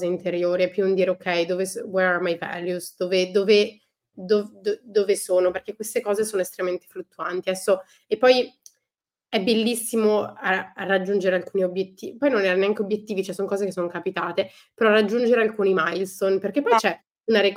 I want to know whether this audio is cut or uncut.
uncut